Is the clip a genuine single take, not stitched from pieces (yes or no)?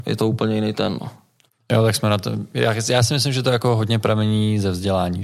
yes